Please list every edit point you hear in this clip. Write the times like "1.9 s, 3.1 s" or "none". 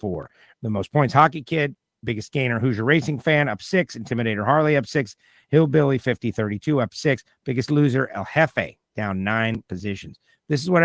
none